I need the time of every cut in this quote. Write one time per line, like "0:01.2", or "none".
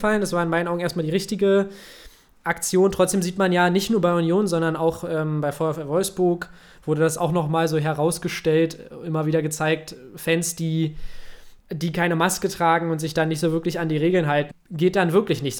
0:11.6
0:14.5

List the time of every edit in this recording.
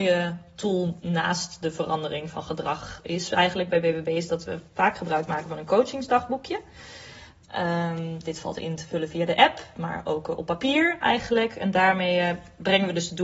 none

